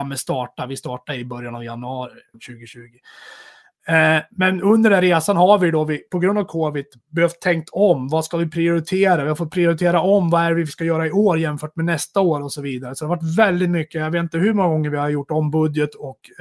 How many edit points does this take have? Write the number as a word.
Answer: one